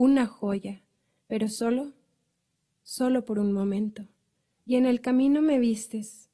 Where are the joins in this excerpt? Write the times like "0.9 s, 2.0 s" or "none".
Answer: 1.2 s, 4.5 s